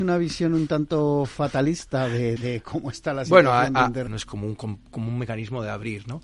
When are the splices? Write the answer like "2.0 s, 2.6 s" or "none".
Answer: 2.4 s, 4.1 s